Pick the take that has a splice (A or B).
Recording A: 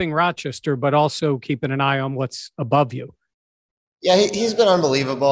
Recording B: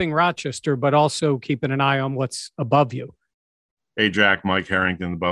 B